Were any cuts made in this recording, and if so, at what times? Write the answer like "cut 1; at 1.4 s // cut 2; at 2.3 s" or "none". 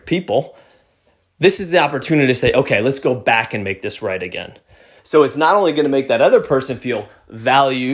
cut 1; at 5.0 s